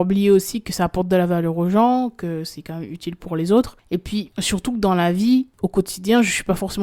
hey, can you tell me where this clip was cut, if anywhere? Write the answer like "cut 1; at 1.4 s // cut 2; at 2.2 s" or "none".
none